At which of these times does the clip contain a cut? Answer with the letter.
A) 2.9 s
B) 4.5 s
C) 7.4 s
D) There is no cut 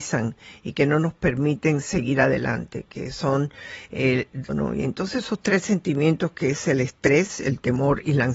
B